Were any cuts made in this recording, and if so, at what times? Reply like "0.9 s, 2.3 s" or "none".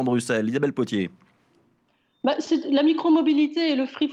none